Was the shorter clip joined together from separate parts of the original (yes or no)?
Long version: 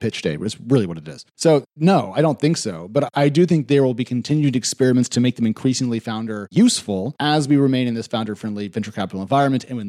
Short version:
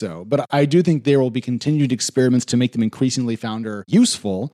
no